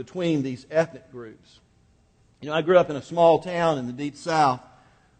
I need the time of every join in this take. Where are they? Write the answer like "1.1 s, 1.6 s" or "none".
none